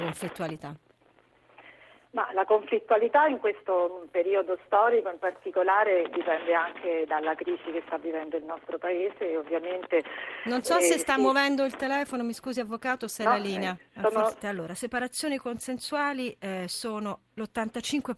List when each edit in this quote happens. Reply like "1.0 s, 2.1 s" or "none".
14.4 s